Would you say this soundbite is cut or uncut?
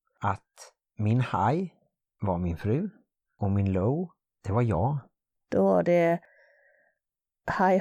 cut